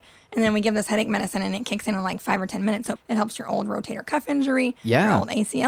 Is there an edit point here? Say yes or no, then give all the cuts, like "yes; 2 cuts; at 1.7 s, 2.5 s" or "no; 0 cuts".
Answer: yes; 1 cut; at 3.0 s